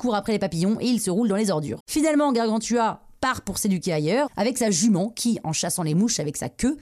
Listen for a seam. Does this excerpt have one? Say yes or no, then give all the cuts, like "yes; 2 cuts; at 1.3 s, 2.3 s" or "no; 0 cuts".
yes; 2 cuts; at 1.8 s, 4.3 s